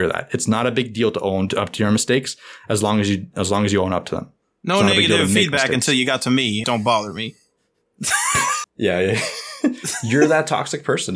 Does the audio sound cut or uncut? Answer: cut